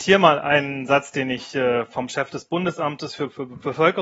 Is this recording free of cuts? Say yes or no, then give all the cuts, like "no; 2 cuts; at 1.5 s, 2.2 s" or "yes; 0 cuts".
yes; 0 cuts